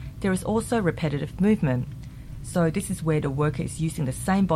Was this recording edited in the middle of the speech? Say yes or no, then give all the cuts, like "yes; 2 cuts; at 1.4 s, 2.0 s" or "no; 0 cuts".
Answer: no; 0 cuts